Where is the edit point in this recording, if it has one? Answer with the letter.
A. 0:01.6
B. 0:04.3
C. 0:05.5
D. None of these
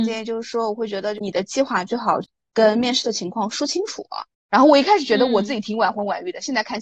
B